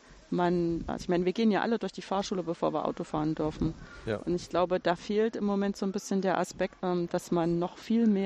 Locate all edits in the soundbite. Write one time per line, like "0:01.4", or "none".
0:06.8